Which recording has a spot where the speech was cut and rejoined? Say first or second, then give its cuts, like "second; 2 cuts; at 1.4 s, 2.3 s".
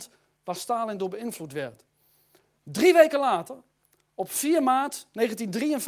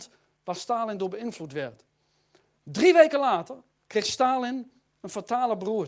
second; 1 cut; at 3.9 s